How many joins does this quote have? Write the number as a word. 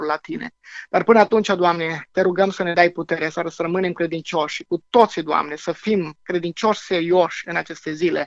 zero